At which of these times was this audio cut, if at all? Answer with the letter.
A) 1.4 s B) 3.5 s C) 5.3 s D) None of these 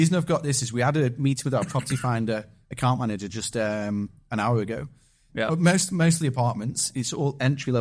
C